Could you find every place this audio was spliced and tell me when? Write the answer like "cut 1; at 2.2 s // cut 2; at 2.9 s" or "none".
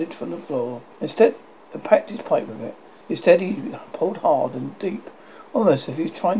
cut 1; at 0.9 s // cut 2; at 3.0 s